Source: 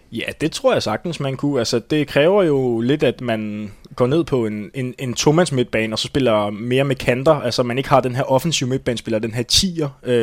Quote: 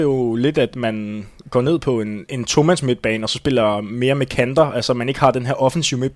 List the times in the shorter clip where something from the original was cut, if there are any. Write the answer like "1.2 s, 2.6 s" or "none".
2.3 s